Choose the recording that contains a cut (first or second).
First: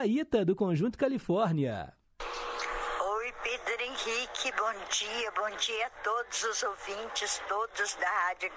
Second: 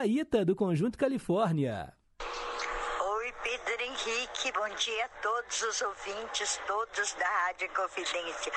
second